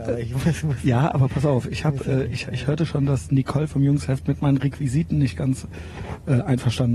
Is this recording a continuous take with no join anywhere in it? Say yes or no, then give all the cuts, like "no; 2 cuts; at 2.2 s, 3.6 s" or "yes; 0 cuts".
yes; 0 cuts